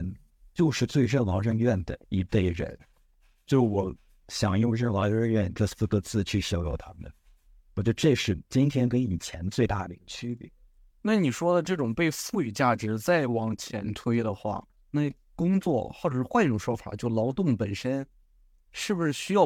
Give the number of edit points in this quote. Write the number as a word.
one